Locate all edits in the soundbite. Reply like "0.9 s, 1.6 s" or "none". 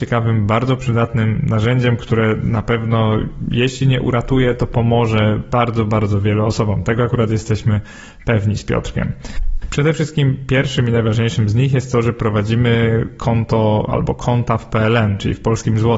9.6 s